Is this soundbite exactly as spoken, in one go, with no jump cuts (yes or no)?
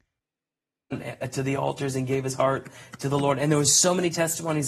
yes